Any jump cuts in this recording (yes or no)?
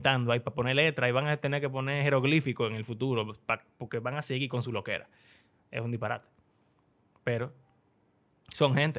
no